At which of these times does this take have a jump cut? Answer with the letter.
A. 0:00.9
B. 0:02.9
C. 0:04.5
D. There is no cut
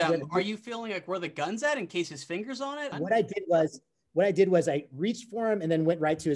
B